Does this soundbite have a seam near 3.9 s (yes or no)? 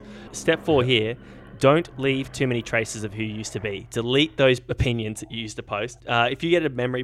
no